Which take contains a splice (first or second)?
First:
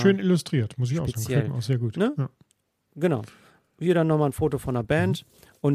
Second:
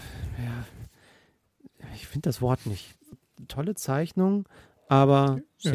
second